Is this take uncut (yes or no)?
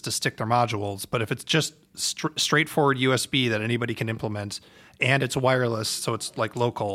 yes